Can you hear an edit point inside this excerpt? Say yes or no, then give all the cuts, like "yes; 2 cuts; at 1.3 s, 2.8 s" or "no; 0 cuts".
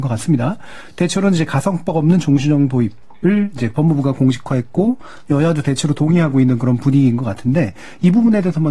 no; 0 cuts